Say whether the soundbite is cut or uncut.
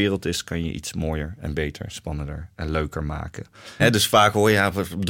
cut